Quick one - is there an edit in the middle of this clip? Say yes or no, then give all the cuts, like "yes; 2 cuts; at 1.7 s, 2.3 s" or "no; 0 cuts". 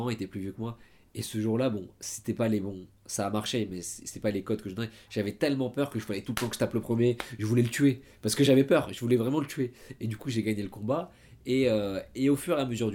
no; 0 cuts